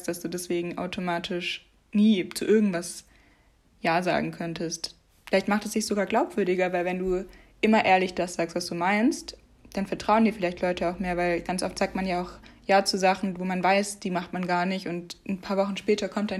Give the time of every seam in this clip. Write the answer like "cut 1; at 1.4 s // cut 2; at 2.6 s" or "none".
none